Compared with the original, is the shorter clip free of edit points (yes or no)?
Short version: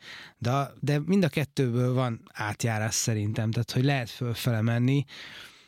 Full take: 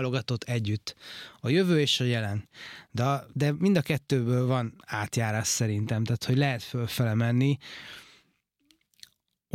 yes